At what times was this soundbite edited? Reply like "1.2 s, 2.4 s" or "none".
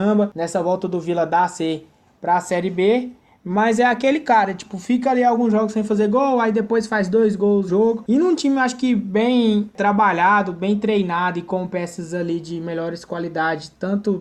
7.7 s